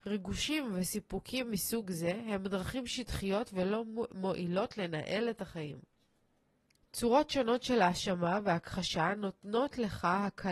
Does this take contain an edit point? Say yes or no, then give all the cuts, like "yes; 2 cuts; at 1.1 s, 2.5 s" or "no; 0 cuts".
yes; 1 cut; at 6.8 s